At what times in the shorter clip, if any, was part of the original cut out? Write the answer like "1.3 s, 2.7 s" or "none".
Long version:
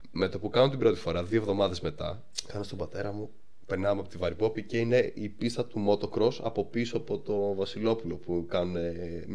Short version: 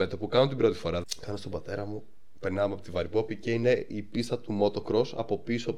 1.0 s

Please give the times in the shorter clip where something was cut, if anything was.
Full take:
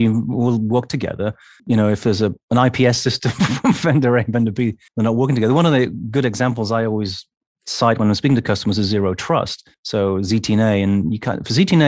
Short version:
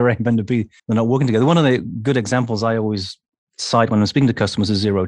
none

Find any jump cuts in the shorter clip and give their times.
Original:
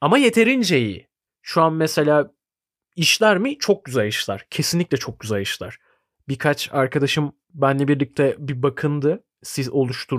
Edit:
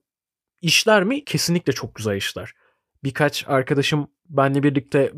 1.2 s

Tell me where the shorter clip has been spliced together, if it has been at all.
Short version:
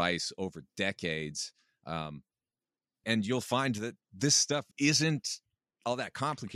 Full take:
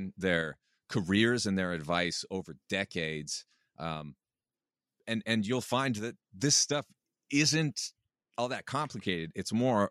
3.0 s, 4.7 s

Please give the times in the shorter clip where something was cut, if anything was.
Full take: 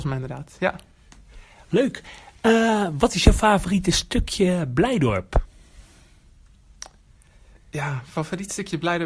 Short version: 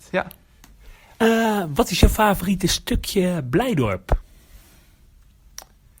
1.1 s

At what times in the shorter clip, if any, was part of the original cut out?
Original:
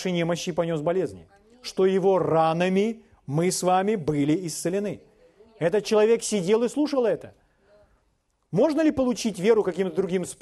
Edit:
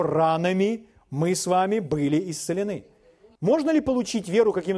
3.4 s

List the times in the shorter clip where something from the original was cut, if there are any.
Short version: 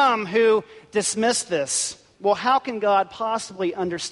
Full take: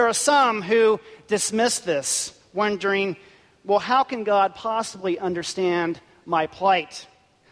2.1 s

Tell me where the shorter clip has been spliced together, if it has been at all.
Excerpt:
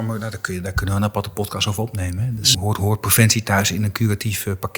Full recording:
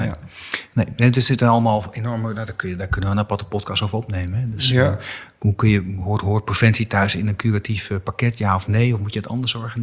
2.5 s

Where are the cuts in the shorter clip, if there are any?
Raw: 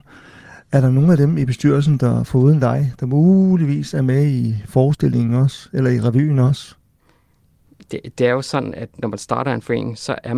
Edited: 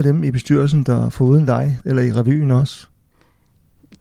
1.8 s

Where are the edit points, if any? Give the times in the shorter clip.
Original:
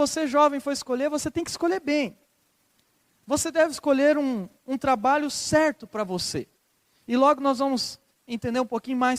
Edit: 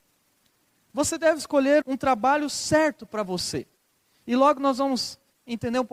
1.8 s

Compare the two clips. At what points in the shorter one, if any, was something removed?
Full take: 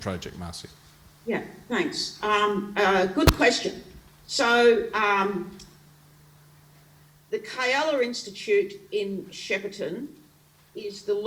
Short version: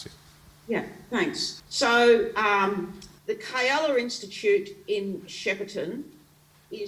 1.6 s, 3.2 s

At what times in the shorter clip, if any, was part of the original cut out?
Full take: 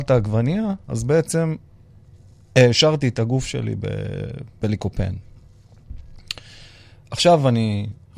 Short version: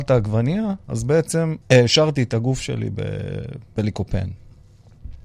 1.6 s

